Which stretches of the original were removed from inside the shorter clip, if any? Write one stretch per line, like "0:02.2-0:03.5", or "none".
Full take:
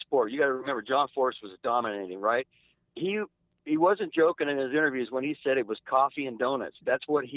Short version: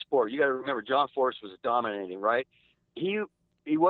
none